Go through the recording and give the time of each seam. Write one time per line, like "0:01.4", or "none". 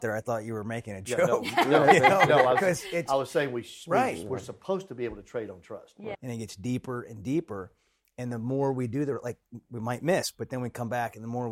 0:06.1